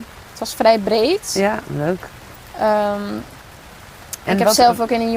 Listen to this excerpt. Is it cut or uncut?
uncut